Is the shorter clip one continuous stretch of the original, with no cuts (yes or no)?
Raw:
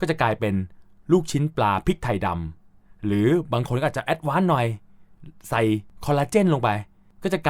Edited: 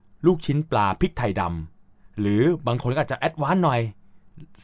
yes